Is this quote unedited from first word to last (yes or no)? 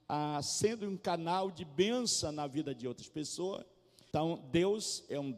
no